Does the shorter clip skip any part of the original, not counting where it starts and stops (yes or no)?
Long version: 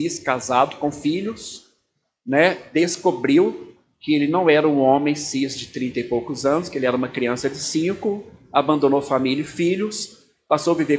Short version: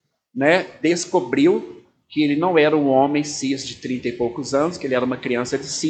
no